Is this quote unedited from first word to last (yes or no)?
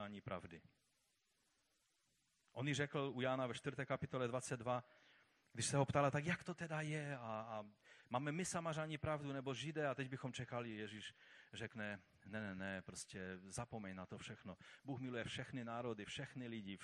yes